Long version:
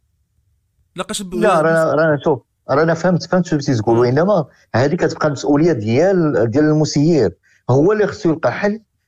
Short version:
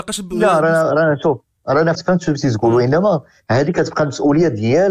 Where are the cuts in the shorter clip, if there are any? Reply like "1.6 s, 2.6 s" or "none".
1.9 s